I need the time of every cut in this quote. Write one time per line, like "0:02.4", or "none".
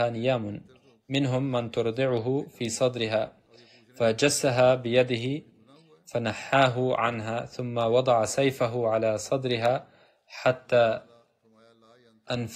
none